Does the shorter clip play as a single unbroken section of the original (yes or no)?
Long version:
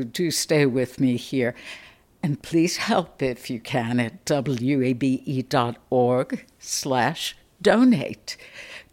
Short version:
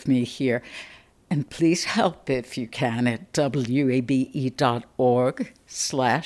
yes